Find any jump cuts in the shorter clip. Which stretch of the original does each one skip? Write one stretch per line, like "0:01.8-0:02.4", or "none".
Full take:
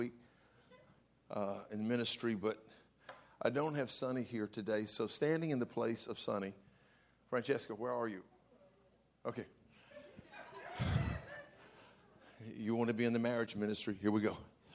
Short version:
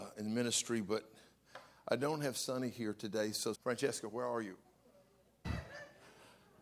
0:05.1-0:07.2
0:09.1-0:11.0